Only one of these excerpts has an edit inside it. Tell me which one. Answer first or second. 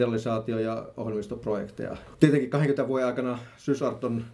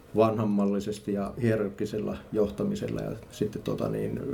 first